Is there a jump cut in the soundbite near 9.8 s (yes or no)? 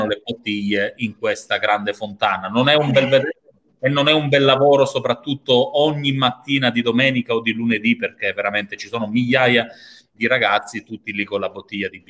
no